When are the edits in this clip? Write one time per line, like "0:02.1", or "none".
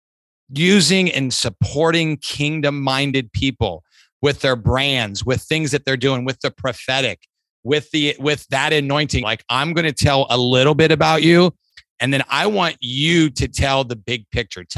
0:09.2

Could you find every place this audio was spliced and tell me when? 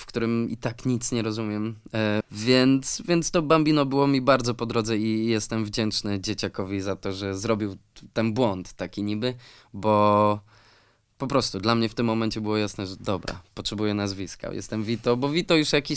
0:02.2

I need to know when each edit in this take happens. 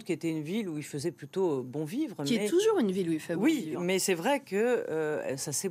none

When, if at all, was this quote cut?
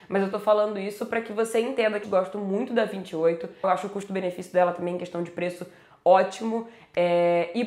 0:02.0
0:03.6

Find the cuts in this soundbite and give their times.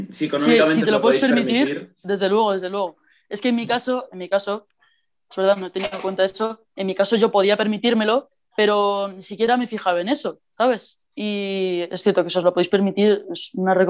none

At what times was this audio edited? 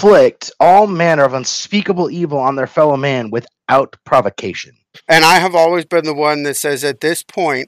0:05.0

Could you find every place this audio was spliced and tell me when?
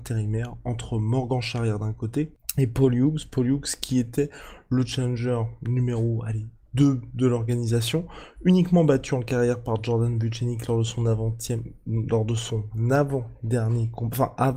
none

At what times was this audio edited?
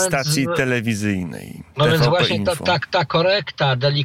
none

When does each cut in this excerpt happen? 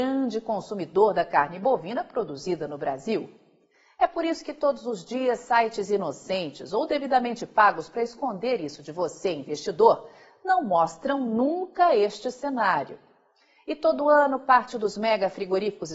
none

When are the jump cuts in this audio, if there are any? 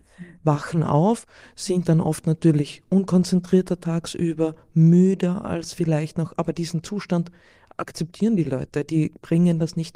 none

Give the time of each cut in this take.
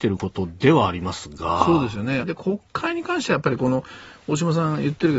0:02.2

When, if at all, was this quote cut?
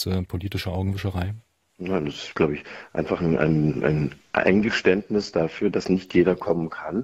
none

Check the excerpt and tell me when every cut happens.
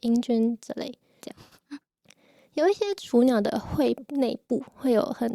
0:01.2

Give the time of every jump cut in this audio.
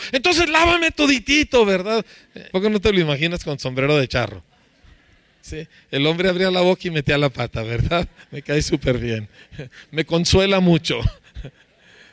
0:02.5

